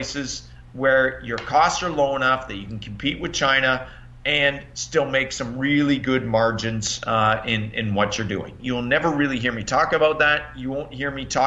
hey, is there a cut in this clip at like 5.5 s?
no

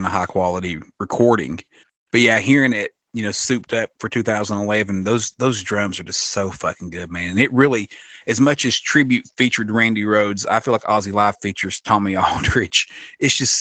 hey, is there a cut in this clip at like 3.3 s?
no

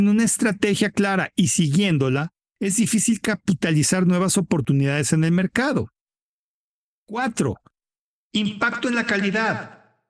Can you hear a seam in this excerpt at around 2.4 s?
yes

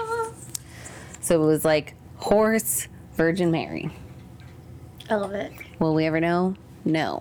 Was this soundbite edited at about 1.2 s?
no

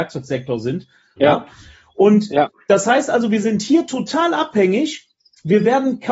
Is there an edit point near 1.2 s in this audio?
yes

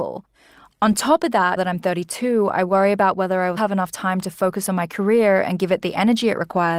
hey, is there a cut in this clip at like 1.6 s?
yes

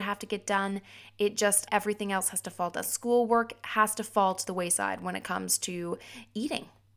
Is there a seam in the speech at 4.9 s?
no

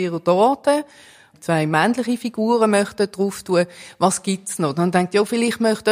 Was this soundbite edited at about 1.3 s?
yes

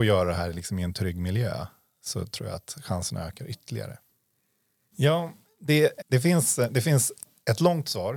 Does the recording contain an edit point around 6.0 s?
yes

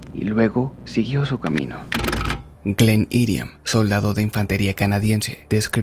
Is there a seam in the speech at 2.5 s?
yes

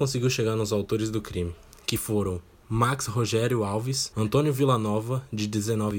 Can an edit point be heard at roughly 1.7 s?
no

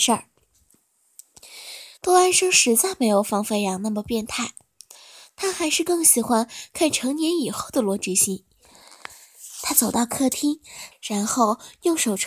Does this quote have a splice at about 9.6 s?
no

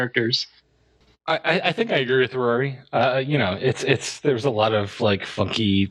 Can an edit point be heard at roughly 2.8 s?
no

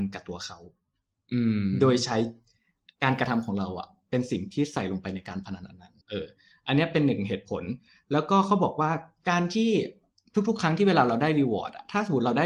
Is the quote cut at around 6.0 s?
yes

